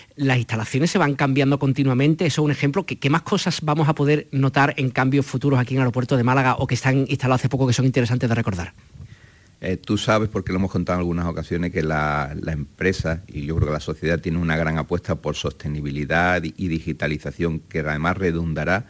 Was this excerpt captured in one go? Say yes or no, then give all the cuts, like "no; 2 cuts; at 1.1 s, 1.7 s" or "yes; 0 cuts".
yes; 0 cuts